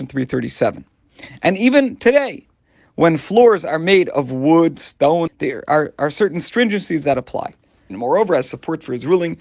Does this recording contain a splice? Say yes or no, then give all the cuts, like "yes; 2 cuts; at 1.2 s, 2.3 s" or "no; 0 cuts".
yes; 2 cuts; at 5.3 s, 7.9 s